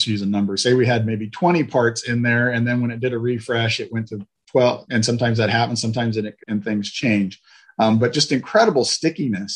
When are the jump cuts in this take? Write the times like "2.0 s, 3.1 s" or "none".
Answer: 4.9 s, 6.4 s